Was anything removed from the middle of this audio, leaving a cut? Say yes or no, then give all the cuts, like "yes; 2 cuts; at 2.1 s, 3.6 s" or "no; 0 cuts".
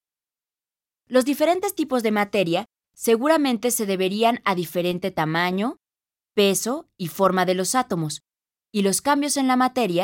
no; 0 cuts